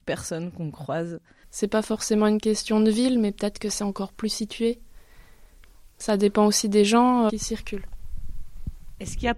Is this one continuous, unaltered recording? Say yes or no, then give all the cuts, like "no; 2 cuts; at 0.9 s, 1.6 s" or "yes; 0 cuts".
no; 2 cuts; at 1.4 s, 7.3 s